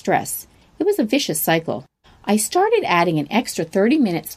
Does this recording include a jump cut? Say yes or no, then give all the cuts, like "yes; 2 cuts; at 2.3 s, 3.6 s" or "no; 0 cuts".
yes; 1 cut; at 2.0 s